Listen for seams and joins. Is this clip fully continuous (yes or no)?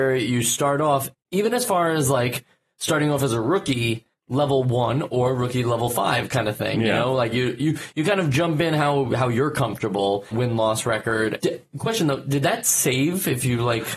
no